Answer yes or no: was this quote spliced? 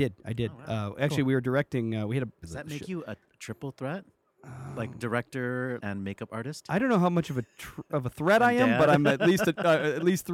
yes